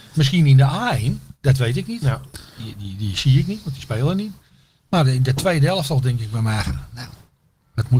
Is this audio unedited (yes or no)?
yes